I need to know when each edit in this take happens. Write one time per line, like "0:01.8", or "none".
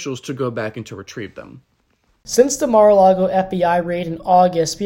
none